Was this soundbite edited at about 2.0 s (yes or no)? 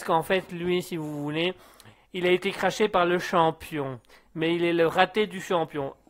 no